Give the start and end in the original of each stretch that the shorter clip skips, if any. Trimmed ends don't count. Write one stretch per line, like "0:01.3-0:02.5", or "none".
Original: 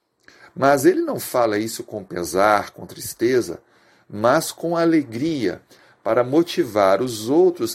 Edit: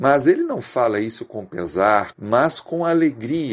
0:02.7-0:04.0

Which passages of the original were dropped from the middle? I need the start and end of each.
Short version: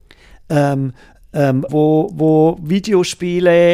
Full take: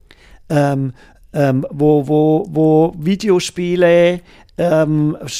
0:01.7-0:02.0

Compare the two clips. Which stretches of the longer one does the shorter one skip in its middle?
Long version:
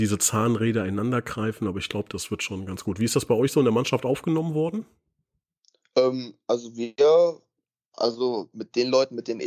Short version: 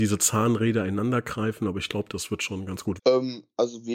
0:03.0-0:05.9

